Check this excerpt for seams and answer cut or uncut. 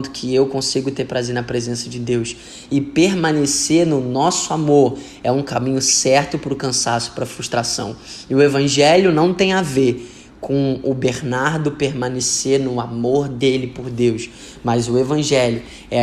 uncut